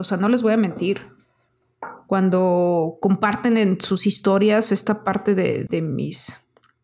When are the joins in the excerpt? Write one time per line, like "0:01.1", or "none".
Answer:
0:05.7